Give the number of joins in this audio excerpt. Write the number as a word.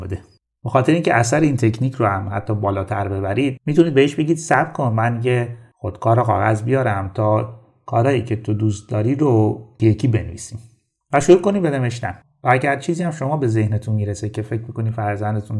one